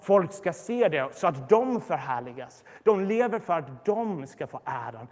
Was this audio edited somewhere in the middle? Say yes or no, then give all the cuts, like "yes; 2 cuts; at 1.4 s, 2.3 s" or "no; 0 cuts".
no; 0 cuts